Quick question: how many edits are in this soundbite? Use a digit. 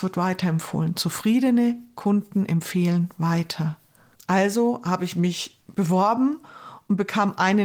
2